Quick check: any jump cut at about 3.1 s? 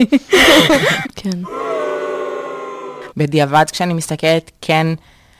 yes; 2 cuts; at 1.0 s, 3.1 s

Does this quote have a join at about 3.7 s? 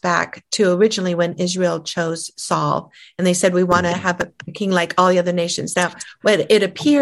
no; 1 cut; at 5.7 s

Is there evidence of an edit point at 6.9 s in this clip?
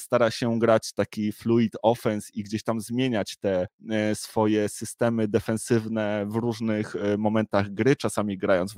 no; 1 cut; at 2.3 s

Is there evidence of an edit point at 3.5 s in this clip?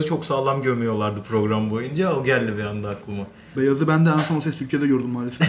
yes; 1 cut; at 3.5 s

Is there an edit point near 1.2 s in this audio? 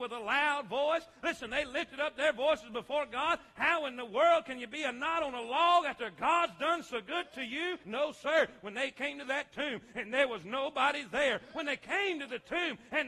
no; 1 cut; at 7.8 s

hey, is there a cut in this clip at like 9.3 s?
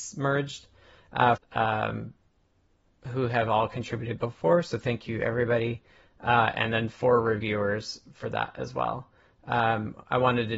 no; 1 cut; at 1.4 s

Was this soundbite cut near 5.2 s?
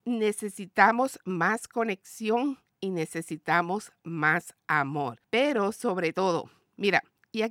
yes; 1 cut; at 5.2 s

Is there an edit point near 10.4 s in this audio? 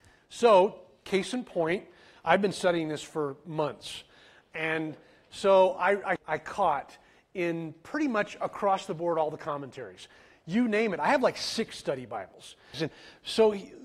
no; 2 cuts; at 6.2 s, 12.7 s

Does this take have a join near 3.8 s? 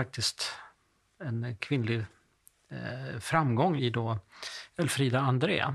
yes; 1 cut; at 3.8 s

